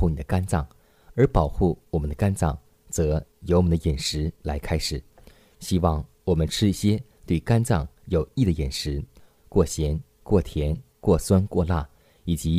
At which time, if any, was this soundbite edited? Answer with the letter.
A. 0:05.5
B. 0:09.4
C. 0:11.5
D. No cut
B